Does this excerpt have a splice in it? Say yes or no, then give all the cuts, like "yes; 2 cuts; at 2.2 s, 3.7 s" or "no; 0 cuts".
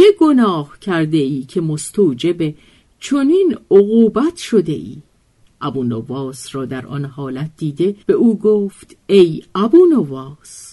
yes; 2 cuts; at 5.5 s, 8.0 s